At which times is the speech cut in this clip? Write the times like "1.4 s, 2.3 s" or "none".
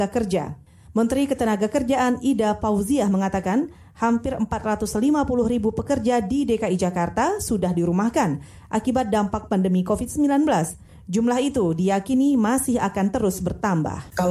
none